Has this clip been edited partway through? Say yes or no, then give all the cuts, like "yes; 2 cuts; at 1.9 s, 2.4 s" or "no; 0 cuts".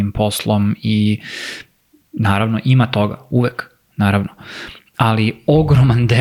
no; 0 cuts